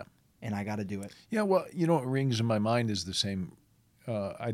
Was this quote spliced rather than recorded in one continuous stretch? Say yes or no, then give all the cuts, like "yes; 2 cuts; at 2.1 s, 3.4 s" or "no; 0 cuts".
no; 0 cuts